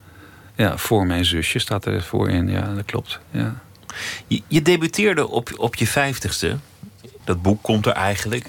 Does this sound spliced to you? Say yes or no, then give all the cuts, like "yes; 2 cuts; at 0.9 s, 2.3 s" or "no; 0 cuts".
yes; 1 cut; at 7.2 s